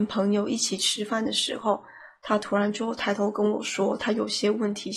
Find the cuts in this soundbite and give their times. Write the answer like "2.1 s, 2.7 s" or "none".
none

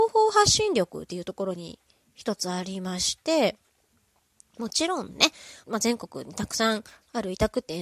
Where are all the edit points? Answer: 5.6 s

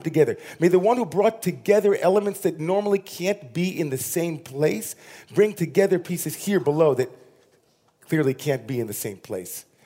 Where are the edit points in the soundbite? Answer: none

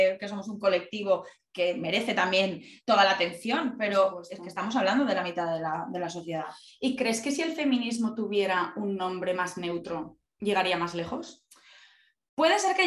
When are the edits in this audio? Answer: none

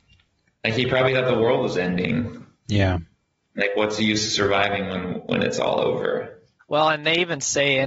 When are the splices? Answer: 6.6 s

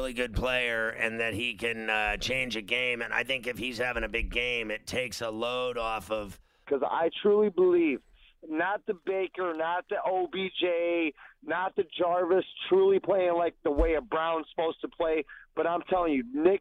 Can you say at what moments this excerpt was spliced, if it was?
6.6 s

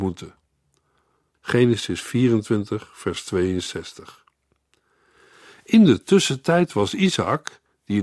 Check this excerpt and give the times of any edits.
1.3 s

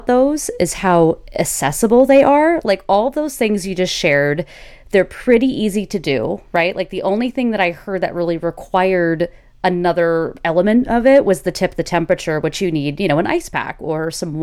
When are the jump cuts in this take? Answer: none

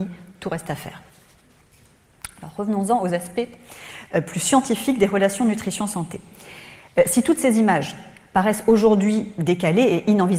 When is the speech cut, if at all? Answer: none

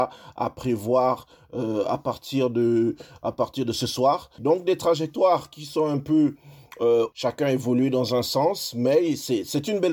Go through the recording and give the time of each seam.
4.4 s, 7.1 s

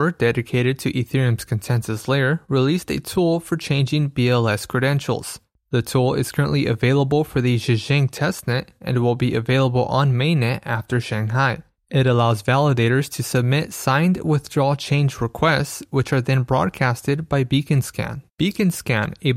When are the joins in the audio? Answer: 18.3 s

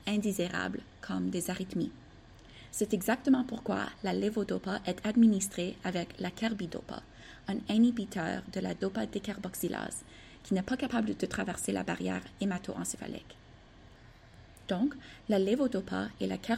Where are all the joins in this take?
none

